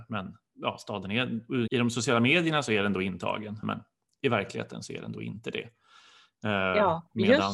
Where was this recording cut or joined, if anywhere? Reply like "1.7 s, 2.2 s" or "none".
1.7 s, 3.6 s